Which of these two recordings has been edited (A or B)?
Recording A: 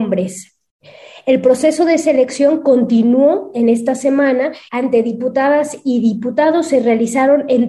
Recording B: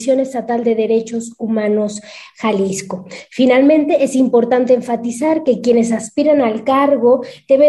A